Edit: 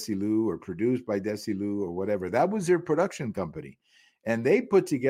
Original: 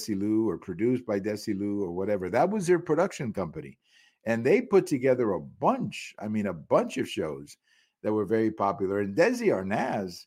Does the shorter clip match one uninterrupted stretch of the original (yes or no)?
yes